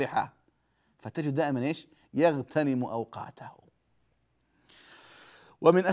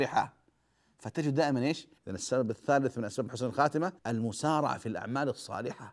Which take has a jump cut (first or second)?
second